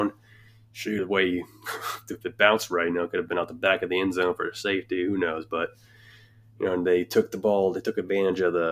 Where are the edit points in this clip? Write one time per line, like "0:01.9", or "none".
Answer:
none